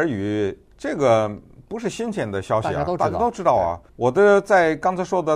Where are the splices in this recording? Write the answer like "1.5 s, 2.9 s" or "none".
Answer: 3.9 s